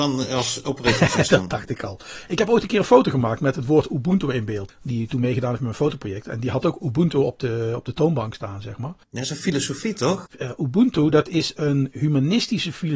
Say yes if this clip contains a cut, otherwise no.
yes